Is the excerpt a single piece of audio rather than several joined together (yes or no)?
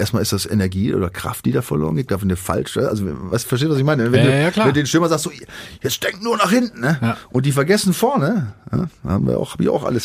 yes